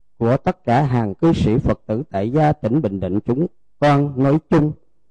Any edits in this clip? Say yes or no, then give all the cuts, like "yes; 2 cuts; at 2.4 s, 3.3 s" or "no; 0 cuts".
no; 0 cuts